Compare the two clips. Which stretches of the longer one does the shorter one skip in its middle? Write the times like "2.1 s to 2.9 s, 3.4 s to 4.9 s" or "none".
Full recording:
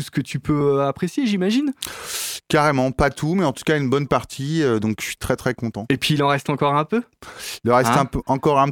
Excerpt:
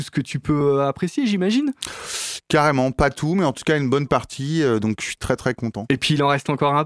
none